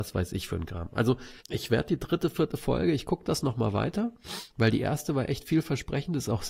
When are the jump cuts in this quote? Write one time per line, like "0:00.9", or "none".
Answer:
0:01.4
0:04.5